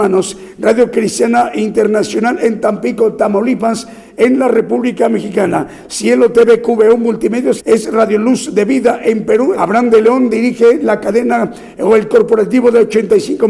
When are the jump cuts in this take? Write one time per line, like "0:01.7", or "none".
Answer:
0:07.6
0:09.5